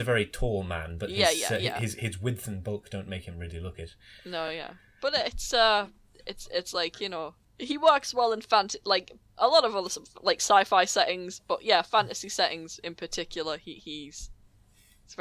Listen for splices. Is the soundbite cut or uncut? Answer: uncut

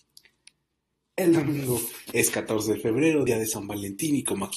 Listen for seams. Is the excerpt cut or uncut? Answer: uncut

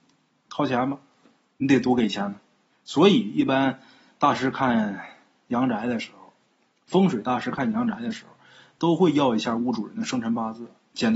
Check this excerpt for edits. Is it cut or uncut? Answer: cut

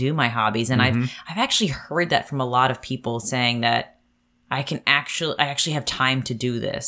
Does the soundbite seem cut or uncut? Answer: uncut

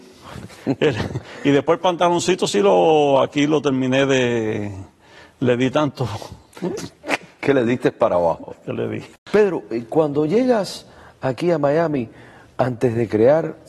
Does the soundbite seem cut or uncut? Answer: uncut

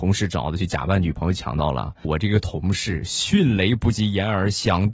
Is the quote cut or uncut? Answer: cut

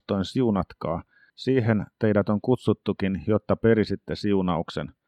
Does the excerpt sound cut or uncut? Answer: uncut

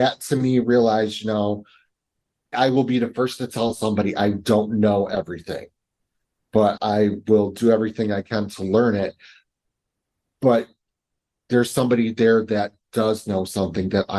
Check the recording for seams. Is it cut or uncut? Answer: cut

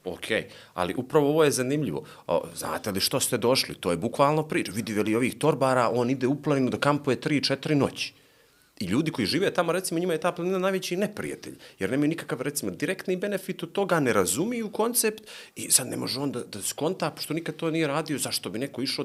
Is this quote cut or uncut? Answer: uncut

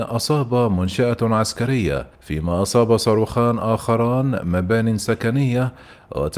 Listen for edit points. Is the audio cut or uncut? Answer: cut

